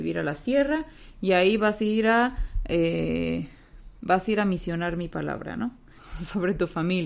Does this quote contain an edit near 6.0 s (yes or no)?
yes